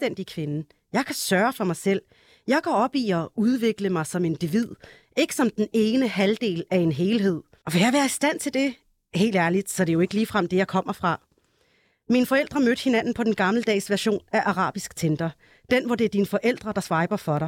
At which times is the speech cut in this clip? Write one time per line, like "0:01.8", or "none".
0:07.6